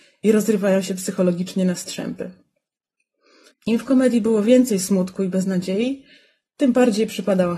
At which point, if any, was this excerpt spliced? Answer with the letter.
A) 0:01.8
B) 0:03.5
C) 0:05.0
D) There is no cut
B